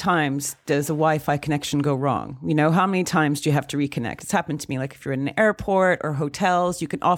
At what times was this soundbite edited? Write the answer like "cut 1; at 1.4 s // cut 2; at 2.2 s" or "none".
none